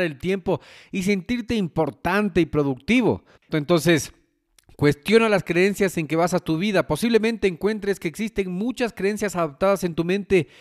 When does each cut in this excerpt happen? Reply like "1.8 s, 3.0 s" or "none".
3.5 s